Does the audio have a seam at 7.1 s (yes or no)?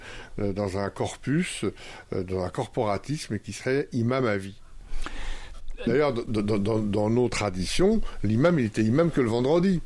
no